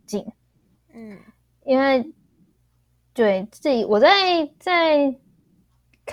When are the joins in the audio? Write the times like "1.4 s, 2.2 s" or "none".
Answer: none